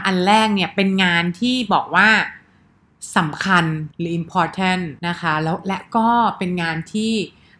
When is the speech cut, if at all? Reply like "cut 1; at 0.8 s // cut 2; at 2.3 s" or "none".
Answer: cut 1; at 3.9 s // cut 2; at 5.0 s